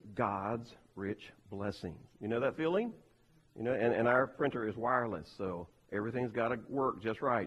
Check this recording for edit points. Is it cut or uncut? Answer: cut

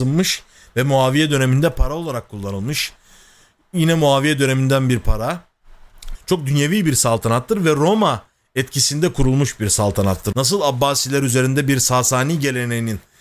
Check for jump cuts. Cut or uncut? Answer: cut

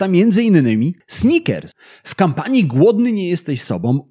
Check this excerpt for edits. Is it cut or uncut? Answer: uncut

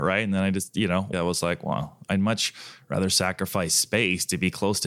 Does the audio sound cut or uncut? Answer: cut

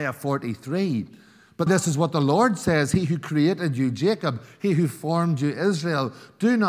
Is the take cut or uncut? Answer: cut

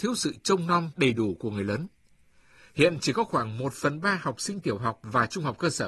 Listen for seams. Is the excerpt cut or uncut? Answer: cut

